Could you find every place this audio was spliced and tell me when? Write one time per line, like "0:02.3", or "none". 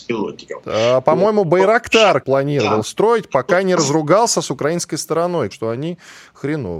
0:02.2
0:05.5